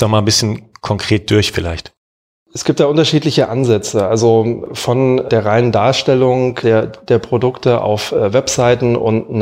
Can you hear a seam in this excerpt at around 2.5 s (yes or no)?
no